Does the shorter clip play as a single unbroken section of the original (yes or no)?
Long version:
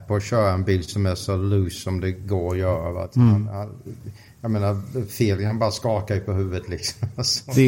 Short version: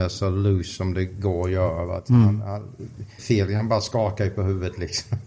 no